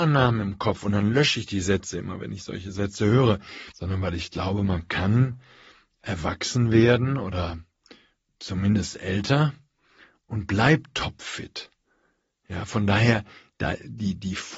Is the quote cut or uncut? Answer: cut